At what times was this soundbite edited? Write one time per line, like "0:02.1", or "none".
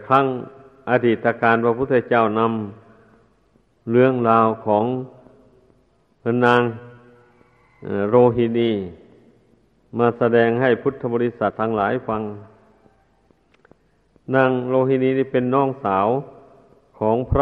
0:11.5